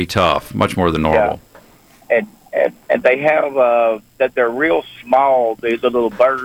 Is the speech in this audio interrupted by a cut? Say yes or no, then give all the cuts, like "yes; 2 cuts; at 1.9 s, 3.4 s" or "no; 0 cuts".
no; 0 cuts